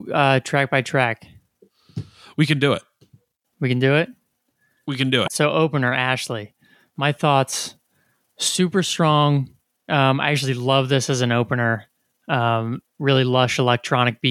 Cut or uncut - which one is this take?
cut